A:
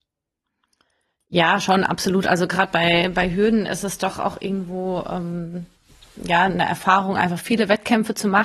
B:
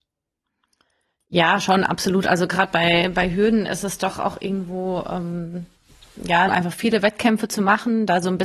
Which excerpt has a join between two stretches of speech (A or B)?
B